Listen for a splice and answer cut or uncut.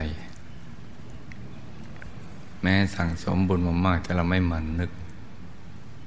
uncut